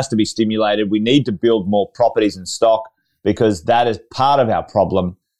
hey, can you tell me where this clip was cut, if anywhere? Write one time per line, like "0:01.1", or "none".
none